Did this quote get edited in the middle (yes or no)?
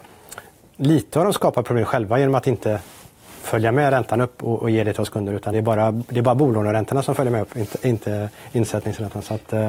no